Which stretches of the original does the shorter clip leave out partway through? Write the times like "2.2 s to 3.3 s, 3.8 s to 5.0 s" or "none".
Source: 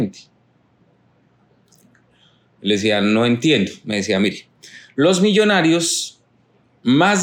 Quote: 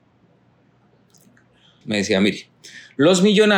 2.4 s to 3.8 s